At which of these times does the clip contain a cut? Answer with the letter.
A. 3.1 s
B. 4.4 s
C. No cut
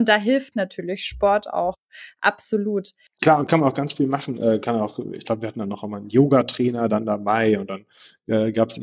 C